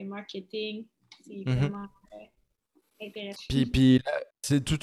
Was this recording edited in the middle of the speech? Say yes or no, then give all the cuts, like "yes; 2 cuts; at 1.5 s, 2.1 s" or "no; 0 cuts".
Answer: yes; 1 cut; at 3.4 s